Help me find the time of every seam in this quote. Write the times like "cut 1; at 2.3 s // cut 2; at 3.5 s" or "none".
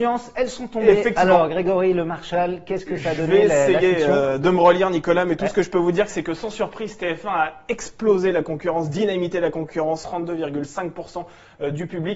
cut 1; at 10.0 s